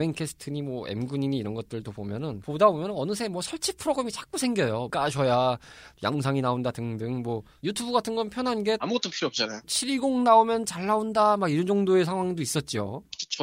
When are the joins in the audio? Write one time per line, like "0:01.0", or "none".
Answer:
0:04.9
0:09.6

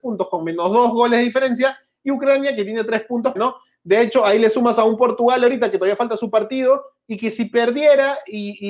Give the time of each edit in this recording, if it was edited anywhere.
0:03.4

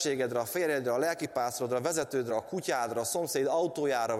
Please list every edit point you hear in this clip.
0:02.3

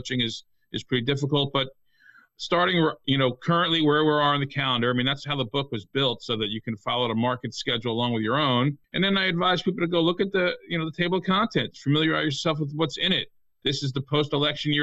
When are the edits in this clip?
0:08.8

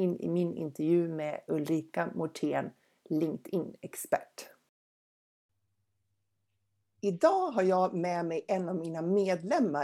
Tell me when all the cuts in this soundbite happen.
none

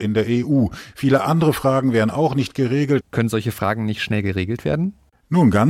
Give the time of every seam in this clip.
0:03.0

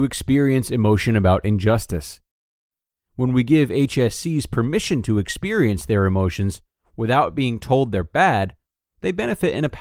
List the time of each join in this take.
0:02.9

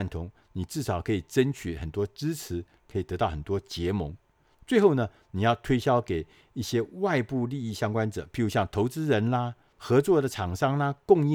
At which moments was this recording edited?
0:09.7

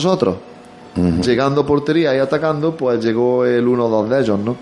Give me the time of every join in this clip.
none

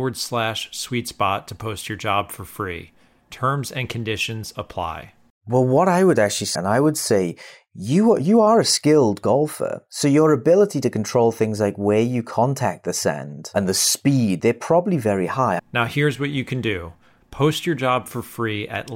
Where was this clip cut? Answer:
0:06.5
0:14.4
0:15.6

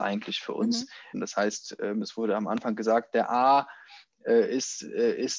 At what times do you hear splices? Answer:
0:01.1

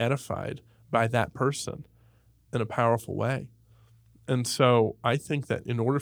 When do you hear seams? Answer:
none

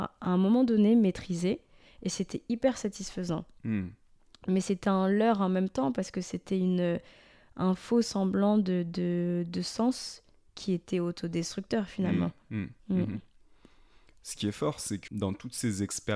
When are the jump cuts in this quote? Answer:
0:12.8
0:15.1

